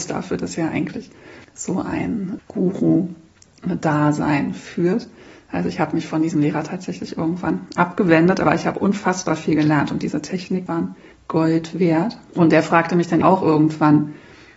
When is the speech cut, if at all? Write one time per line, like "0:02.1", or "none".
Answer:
0:10.7
0:13.2